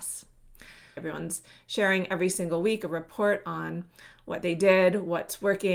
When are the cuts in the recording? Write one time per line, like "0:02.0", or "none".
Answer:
0:01.0

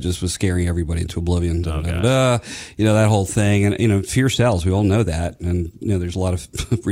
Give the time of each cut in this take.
0:01.6

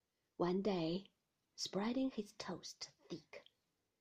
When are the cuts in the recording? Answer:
0:01.4

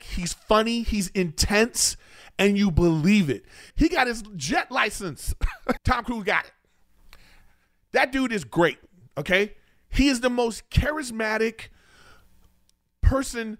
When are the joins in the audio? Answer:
0:03.7
0:05.8

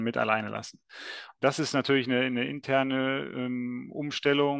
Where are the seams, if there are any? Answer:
none

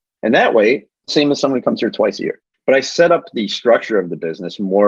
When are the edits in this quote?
0:00.9
0:02.5

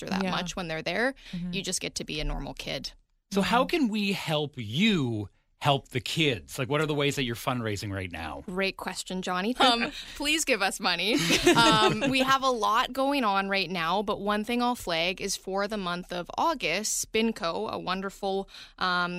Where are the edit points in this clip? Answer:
0:09.5

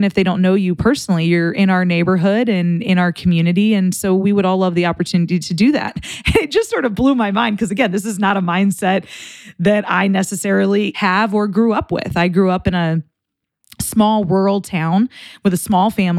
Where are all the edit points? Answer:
none

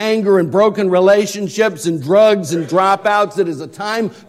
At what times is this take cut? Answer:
none

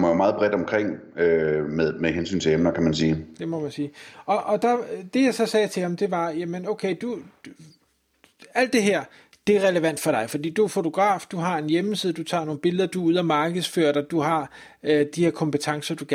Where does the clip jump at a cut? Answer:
0:15.1

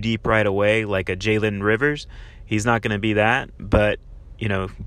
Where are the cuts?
none

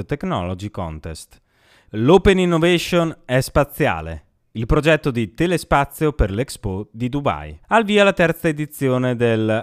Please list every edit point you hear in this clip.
0:01.9
0:07.6

